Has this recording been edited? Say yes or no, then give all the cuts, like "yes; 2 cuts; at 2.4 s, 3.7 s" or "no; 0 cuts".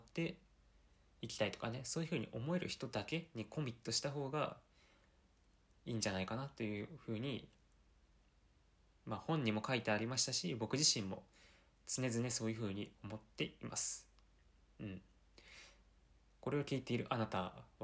no; 0 cuts